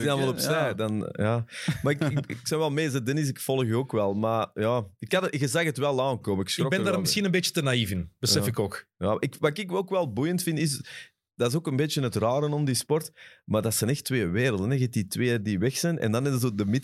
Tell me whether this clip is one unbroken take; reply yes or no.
yes